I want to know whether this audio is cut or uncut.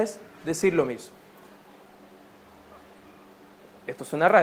uncut